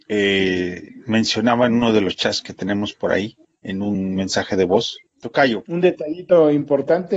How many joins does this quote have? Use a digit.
1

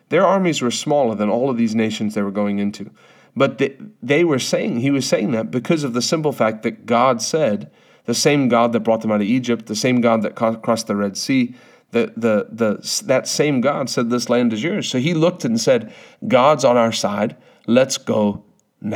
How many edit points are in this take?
0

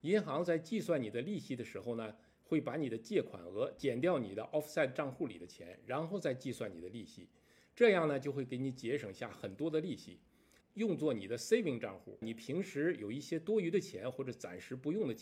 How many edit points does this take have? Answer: 2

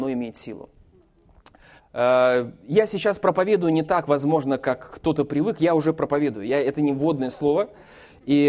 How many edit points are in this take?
1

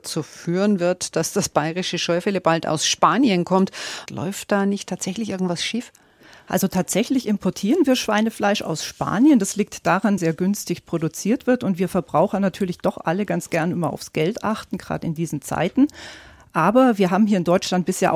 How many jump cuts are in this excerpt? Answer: 2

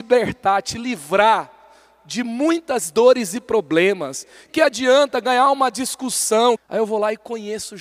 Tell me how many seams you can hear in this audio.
2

